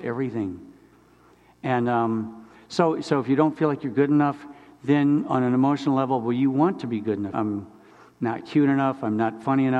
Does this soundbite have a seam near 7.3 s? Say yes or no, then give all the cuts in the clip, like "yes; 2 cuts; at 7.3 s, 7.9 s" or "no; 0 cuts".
yes; 1 cut; at 7.3 s